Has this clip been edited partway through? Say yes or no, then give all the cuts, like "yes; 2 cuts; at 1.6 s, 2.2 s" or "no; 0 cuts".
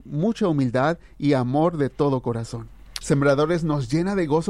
yes; 1 cut; at 3.0 s